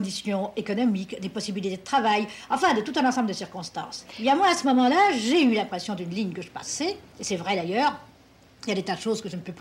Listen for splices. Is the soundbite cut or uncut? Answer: uncut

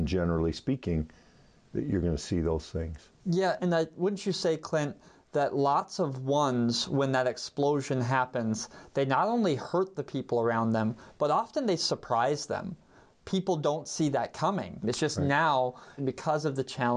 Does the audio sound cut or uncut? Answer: cut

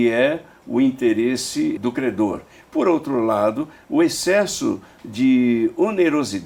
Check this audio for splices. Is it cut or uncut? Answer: cut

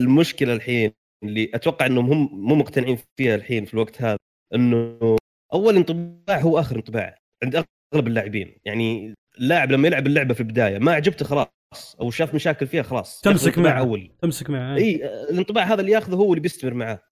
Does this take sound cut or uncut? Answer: uncut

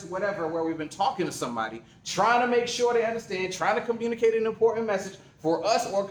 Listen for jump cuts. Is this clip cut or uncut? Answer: uncut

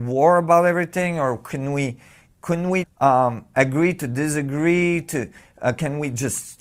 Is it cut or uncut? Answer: cut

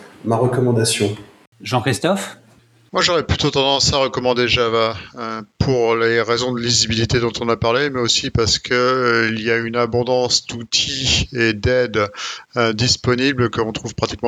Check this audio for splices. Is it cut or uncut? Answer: uncut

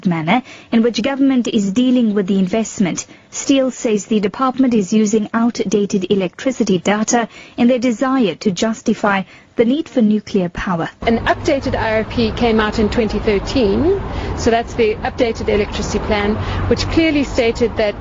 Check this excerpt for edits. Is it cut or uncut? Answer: uncut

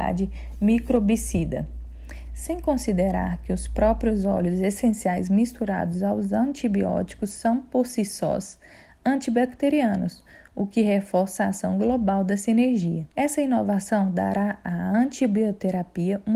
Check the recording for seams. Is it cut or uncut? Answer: cut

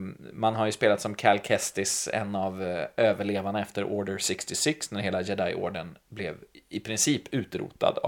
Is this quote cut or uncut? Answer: uncut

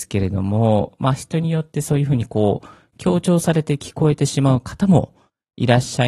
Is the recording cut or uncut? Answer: uncut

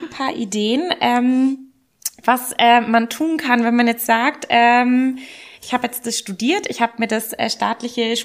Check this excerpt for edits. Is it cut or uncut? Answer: cut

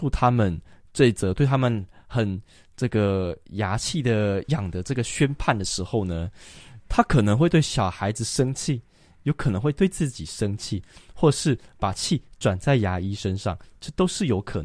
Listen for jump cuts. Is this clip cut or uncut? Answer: cut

